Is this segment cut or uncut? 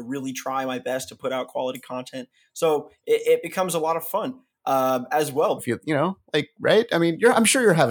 cut